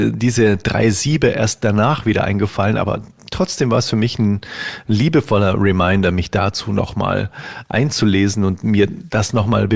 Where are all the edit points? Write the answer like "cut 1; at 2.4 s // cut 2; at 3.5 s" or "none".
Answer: none